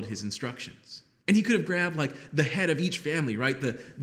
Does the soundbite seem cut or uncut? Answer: cut